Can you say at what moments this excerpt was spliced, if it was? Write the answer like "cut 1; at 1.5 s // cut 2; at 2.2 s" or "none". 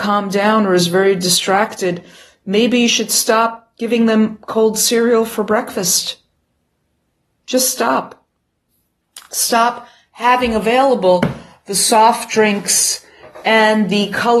none

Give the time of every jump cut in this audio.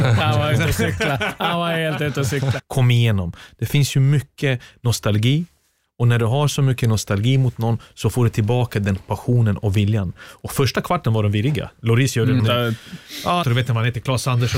cut 1; at 2.6 s // cut 2; at 12.4 s // cut 3; at 13.4 s

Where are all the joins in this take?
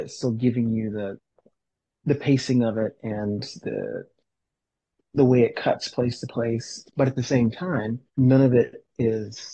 cut 1; at 6.8 s // cut 2; at 8.1 s

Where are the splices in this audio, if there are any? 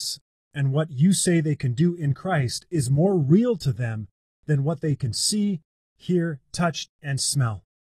cut 1; at 6.9 s

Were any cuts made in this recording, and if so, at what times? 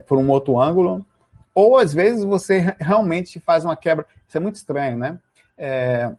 none

